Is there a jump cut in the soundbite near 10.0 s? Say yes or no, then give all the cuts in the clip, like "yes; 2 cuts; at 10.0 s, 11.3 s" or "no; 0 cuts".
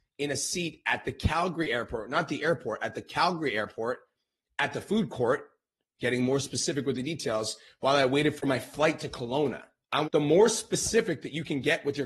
yes; 1 cut; at 10.0 s